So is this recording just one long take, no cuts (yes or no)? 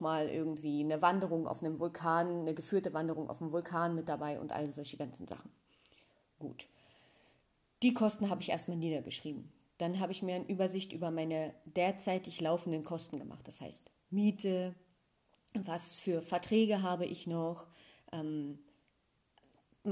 yes